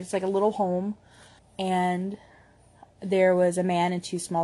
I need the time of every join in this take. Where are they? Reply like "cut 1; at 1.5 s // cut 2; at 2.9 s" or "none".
cut 1; at 1.4 s